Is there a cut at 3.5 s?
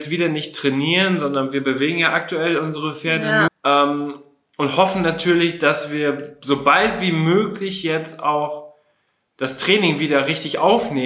yes; 1 cut; at 3.5 s

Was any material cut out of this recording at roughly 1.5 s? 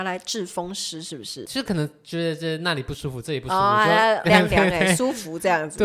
no; 1 cut; at 4.2 s

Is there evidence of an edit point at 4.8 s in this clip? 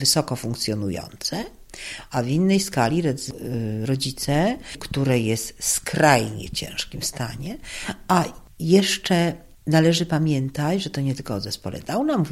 yes; 1 cut; at 4.8 s

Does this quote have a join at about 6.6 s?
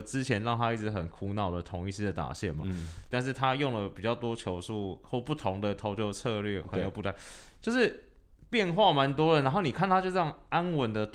yes; 2 cuts; at 3.1 s, 6.6 s

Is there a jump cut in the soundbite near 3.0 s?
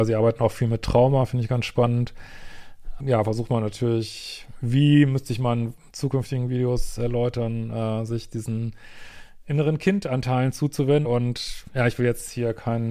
yes; 2 cuts; at 3.0 s, 11.0 s

